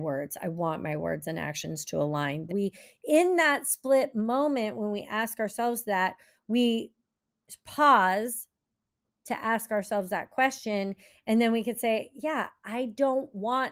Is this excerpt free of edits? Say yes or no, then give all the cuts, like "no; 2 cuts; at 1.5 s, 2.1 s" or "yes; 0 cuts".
no; 1 cut; at 2.5 s